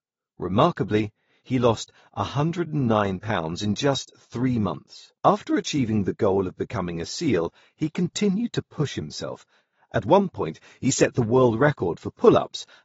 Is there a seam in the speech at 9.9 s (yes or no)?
no